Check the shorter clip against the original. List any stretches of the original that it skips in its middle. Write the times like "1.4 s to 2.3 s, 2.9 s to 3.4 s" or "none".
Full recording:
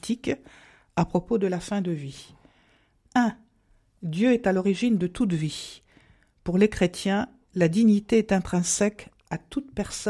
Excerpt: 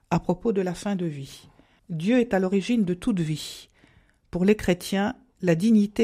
2.6 s to 3.9 s